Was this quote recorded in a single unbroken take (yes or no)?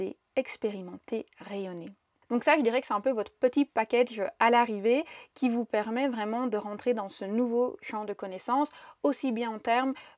yes